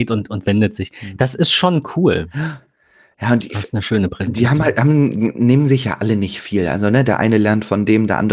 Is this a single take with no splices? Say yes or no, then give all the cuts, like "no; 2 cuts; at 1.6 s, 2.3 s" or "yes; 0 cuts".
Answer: yes; 0 cuts